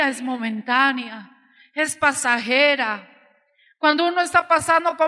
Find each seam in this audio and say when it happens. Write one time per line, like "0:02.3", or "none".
none